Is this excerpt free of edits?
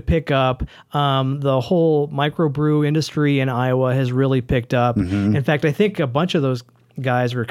yes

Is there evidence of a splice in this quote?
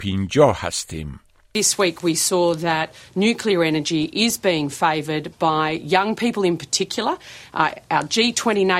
no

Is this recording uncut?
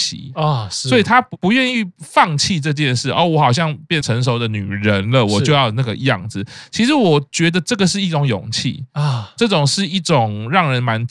no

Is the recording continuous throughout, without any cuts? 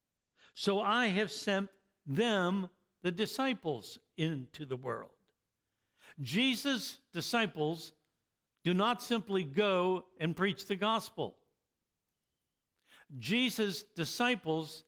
yes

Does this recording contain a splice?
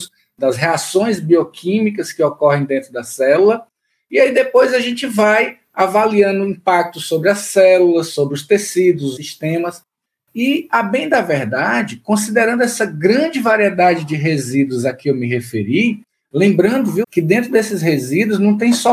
yes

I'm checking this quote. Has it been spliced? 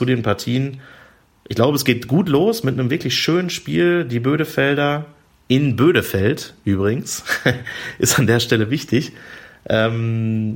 no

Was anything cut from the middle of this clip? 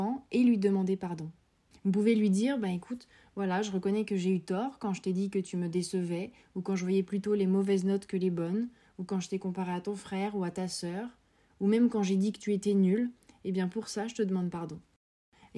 no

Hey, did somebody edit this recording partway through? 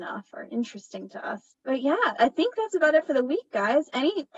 no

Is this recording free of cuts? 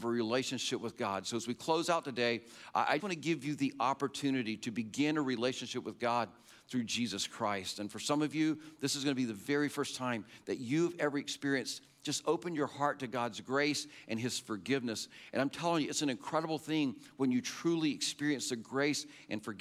no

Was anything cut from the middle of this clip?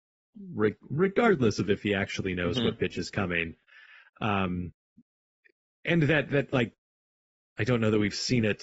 no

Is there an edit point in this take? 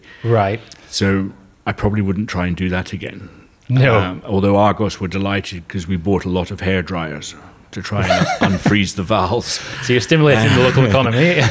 no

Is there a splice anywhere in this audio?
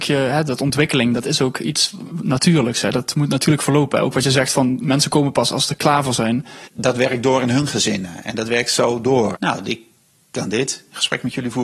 yes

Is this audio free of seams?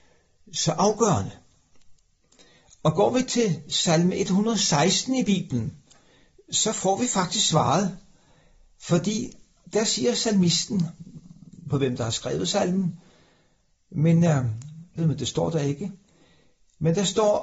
no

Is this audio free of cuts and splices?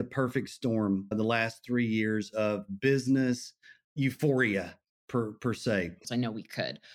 no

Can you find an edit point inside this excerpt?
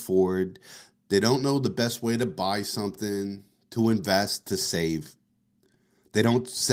no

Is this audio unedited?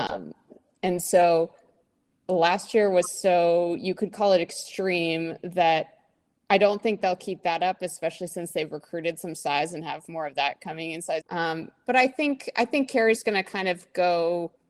no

